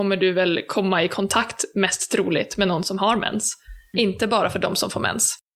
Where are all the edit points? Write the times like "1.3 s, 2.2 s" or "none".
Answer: 3.9 s